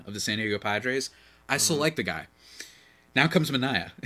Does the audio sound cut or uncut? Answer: uncut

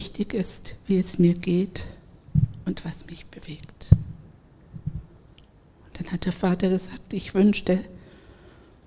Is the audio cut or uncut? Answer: uncut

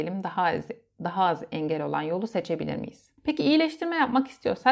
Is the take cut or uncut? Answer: cut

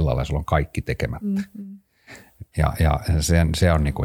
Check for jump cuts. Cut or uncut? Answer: uncut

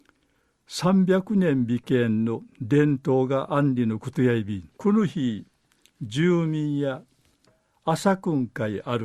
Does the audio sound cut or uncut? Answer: cut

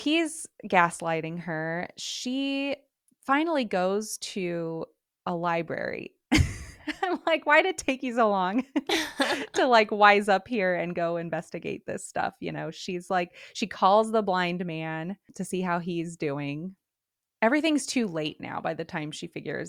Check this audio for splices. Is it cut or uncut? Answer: uncut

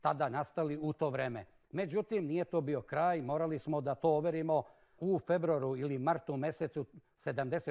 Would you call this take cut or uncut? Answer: cut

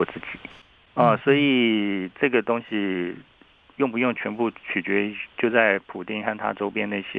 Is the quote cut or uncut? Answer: uncut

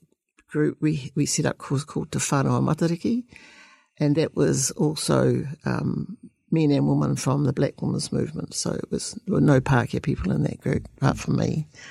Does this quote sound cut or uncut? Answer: uncut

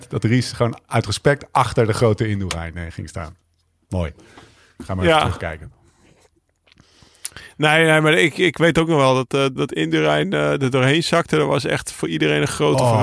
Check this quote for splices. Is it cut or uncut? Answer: cut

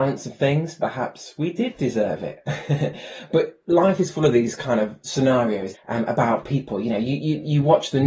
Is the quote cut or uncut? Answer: cut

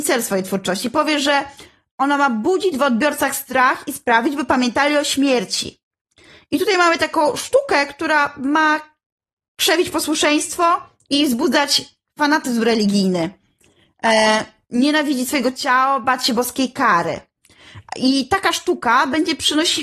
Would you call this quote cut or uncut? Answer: uncut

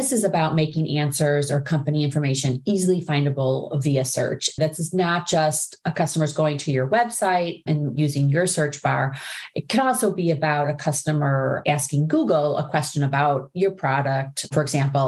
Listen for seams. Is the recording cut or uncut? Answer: cut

